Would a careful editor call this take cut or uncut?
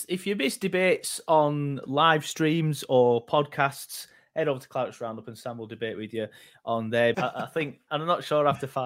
cut